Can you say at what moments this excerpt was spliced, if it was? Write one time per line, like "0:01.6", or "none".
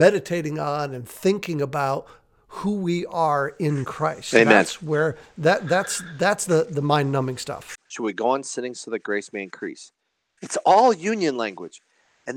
0:07.7
0:10.4